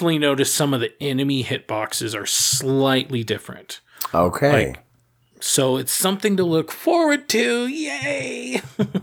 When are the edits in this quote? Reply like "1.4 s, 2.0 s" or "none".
none